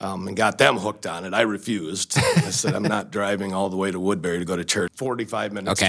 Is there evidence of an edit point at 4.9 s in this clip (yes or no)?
yes